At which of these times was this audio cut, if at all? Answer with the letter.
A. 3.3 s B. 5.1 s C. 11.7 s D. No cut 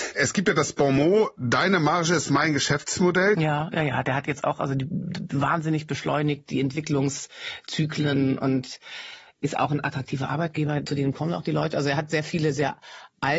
A